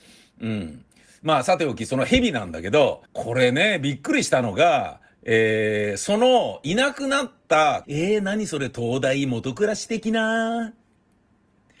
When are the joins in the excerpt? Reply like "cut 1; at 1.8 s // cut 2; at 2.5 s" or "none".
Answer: cut 1; at 3.1 s // cut 2; at 7.8 s